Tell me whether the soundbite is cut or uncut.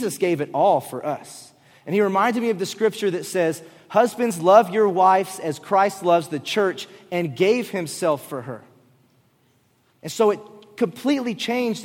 uncut